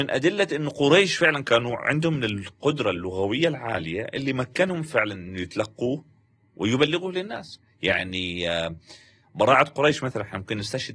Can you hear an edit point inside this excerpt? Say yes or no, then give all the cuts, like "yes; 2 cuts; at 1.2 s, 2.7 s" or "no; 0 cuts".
no; 0 cuts